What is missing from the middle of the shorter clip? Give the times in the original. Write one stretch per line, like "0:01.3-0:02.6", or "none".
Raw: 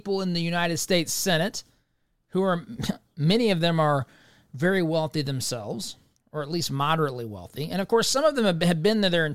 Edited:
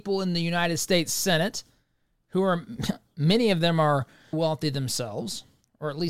0:04.3-0:04.9